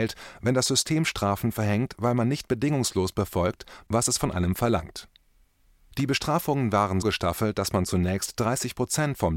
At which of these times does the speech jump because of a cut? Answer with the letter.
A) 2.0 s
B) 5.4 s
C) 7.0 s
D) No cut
C